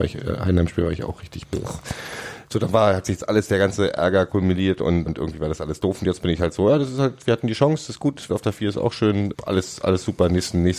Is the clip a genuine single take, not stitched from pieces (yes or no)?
no